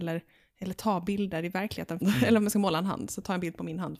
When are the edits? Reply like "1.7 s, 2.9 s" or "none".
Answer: 2.0 s